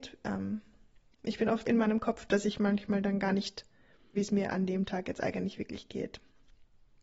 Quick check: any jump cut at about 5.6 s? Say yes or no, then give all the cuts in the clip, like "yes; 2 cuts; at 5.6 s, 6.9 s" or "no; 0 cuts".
no; 2 cuts; at 1.6 s, 4.1 s